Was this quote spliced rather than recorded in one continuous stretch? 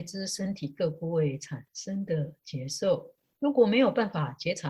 no; 0 cuts

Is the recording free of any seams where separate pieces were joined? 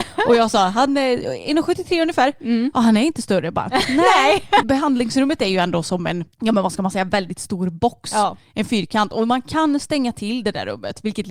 no; 2 cuts; at 4.6 s, 6.3 s

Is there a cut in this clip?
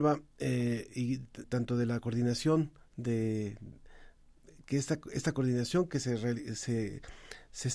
yes; 1 cut; at 1.4 s

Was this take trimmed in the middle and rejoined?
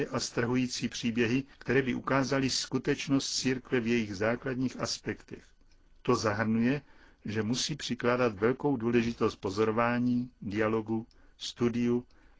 yes; 1 cut; at 1.5 s

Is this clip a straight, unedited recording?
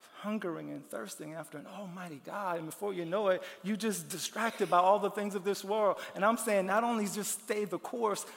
yes; 0 cuts

